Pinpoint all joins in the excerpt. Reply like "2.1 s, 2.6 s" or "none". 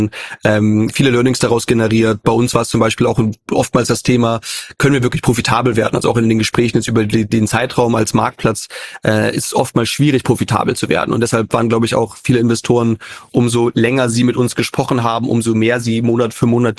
none

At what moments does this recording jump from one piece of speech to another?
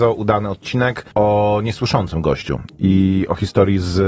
1.1 s

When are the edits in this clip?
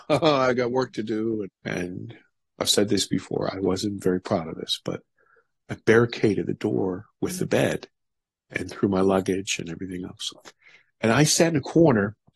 1.4 s, 3.5 s

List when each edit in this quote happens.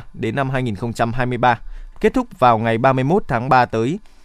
1.9 s

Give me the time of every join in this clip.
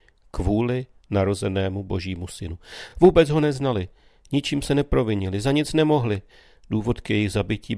none

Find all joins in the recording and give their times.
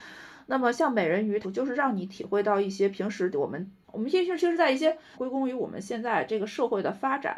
1.4 s, 5.1 s

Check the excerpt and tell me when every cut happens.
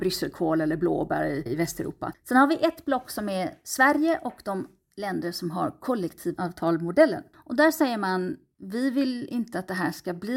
2.1 s, 7.3 s

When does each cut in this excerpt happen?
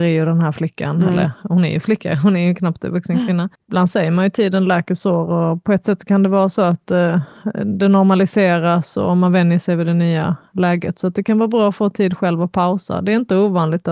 3.5 s

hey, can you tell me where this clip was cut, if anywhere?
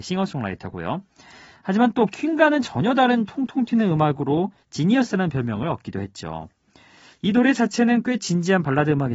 none

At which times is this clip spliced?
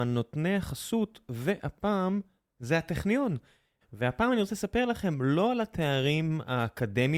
3.8 s

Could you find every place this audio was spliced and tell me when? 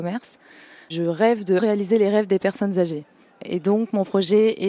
1.6 s

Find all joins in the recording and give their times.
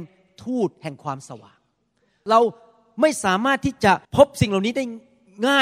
4.0 s

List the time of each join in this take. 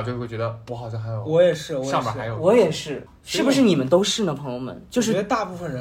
3.1 s

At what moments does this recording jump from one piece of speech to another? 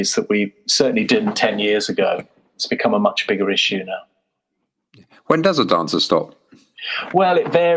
none

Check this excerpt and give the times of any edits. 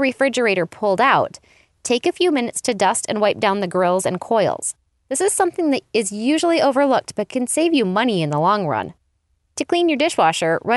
9.4 s

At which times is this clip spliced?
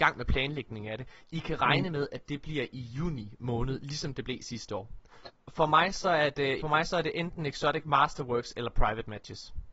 5.2 s, 6.6 s

